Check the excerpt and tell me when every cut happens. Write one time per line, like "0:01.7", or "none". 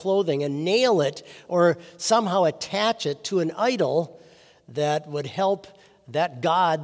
none